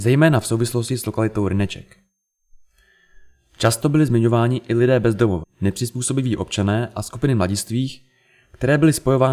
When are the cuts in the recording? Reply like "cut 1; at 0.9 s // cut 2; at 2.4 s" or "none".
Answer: cut 1; at 5.4 s